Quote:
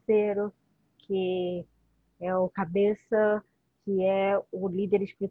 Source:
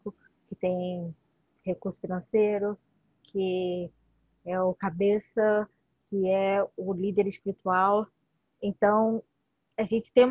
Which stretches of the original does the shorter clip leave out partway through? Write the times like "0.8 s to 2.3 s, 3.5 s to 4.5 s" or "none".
none